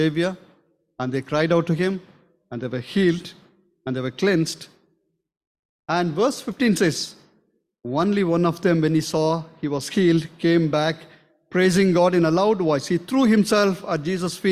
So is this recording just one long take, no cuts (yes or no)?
yes